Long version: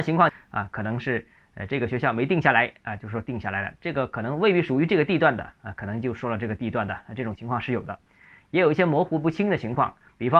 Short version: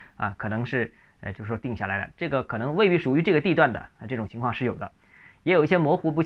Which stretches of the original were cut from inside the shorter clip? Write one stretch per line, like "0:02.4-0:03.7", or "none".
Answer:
0:01.7-0:03.0
0:05.6-0:07.1